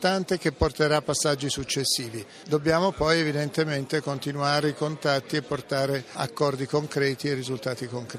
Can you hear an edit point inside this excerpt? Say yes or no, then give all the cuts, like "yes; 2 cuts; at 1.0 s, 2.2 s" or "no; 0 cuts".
no; 0 cuts